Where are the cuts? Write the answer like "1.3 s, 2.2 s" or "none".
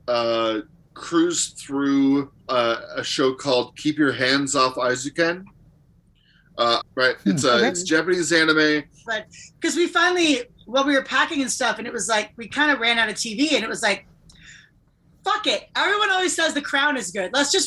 2.4 s, 6.8 s, 9.1 s